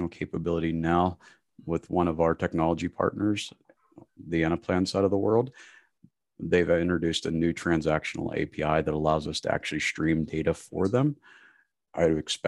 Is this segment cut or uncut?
uncut